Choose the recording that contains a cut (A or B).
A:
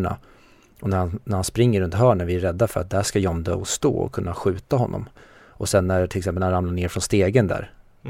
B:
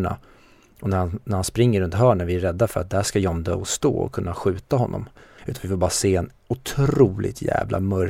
B